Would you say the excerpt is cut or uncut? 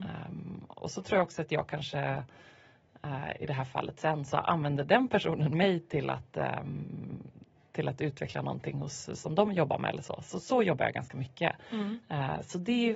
uncut